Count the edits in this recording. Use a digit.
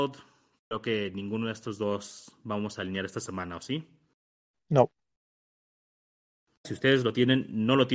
1